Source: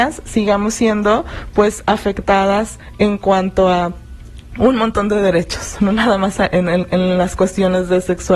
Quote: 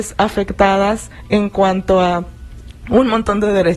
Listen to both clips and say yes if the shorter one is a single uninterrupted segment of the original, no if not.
yes